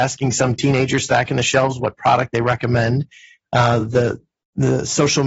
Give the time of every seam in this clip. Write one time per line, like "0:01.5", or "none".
none